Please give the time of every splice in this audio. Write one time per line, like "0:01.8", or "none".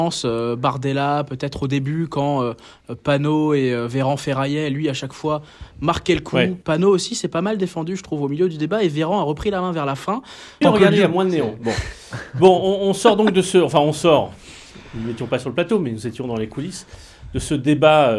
0:06.6
0:10.6